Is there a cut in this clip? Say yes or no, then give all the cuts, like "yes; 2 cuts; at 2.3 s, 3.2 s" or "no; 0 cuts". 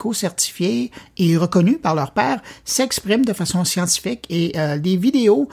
no; 0 cuts